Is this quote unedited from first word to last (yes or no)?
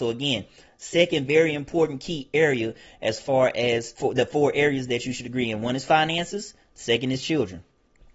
no